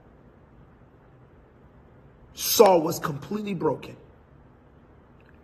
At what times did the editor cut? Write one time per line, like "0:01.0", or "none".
none

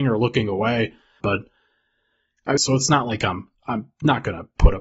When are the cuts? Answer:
0:01.2
0:02.6

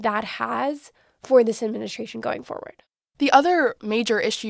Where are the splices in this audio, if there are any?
none

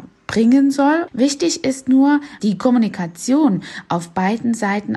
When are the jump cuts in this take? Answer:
0:01.1
0:02.4

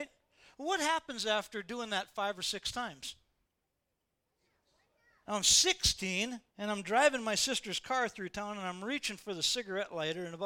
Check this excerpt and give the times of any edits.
0:05.2
0:06.5

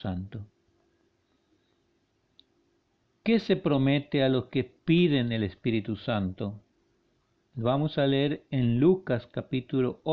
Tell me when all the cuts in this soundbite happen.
none

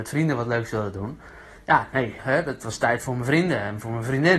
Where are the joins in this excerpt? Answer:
0:02.2

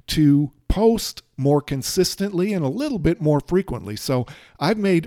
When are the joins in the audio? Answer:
none

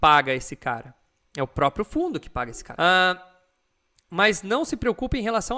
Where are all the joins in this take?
0:02.8

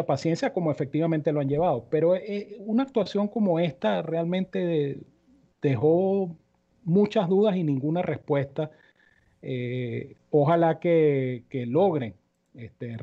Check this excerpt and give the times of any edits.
none

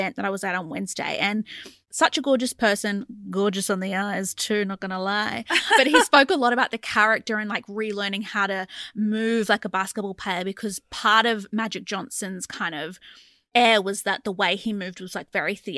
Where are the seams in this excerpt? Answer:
none

